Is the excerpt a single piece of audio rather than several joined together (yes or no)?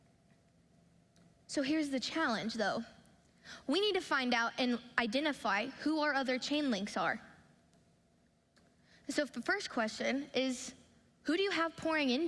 no